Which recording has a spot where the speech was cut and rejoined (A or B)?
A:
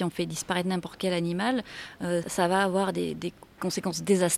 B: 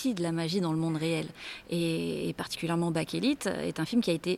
A